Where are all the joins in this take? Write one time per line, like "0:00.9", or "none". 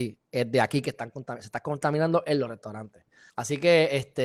0:03.3